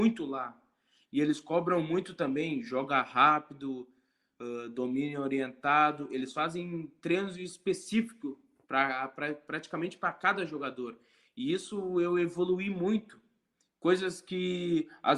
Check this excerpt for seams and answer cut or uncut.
uncut